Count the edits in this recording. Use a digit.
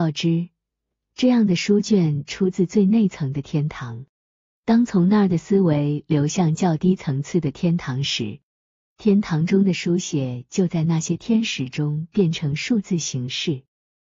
0